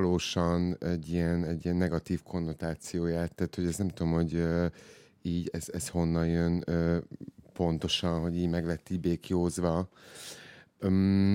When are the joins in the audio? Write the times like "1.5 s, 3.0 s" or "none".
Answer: none